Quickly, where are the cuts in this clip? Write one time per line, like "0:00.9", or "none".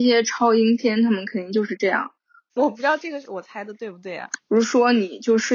0:02.5
0:04.4